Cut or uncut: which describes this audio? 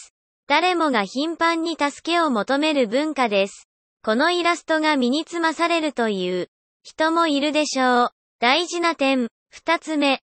cut